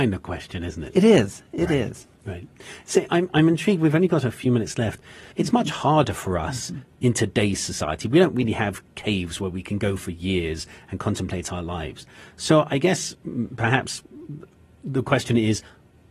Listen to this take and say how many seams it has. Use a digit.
1